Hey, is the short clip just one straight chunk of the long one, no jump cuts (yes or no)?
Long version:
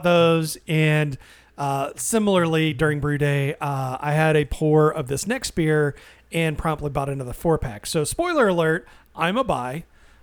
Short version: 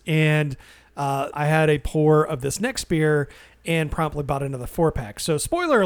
no